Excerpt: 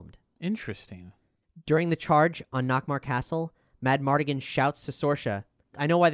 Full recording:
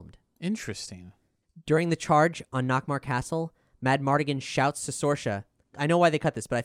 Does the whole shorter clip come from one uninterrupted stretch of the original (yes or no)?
yes